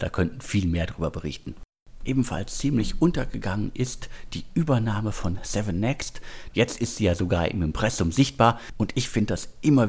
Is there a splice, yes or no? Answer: yes